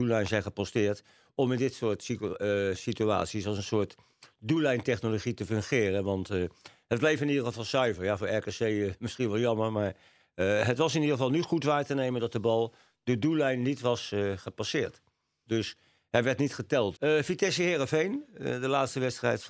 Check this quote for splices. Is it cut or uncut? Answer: cut